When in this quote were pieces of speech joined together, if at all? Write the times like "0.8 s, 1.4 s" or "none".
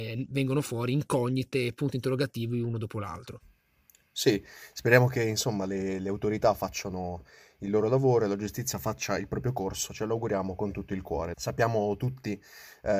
11.3 s